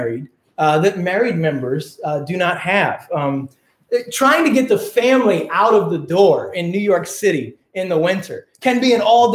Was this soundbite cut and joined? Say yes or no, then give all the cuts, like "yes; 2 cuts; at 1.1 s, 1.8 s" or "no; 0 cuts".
no; 0 cuts